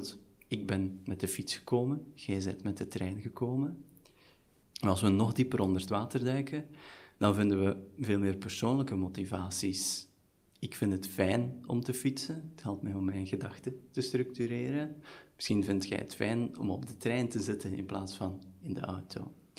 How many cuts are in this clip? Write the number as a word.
one